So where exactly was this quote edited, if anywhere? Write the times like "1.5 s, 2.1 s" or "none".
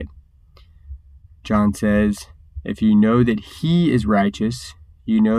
none